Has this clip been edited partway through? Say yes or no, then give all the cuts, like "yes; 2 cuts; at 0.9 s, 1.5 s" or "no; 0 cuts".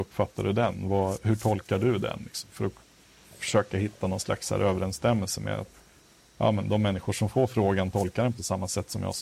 no; 0 cuts